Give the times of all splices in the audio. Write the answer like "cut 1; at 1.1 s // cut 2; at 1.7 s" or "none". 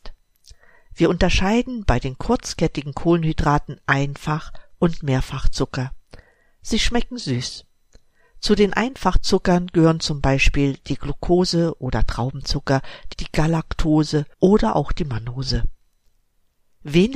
cut 1; at 13.1 s // cut 2; at 14.3 s